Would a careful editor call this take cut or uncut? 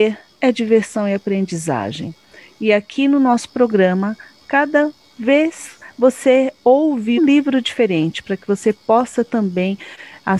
cut